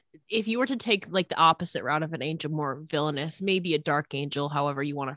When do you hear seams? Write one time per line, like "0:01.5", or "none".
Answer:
none